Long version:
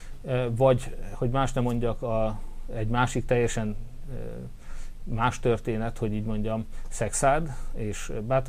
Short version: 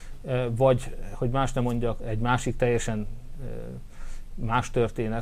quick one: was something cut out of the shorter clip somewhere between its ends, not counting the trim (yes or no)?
yes